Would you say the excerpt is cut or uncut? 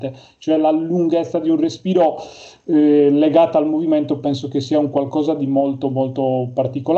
uncut